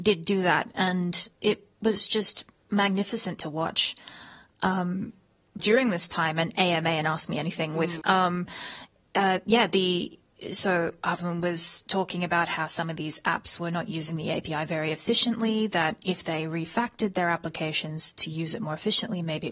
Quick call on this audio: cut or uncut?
cut